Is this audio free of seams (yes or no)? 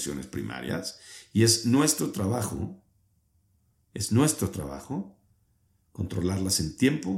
yes